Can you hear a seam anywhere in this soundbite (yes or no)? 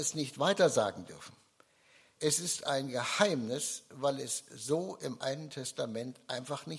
no